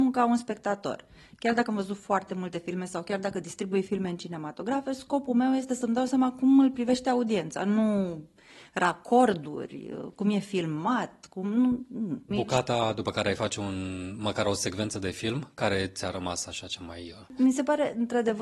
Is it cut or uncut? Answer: cut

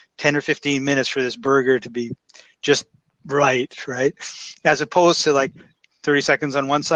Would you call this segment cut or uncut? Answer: uncut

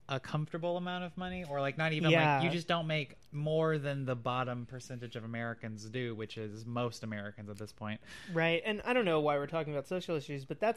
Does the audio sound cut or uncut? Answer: uncut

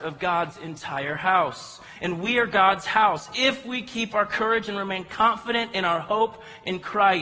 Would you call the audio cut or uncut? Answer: uncut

